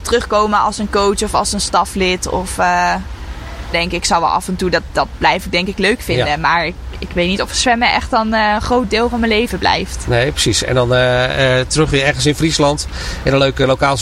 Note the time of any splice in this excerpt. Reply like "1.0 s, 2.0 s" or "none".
3.7 s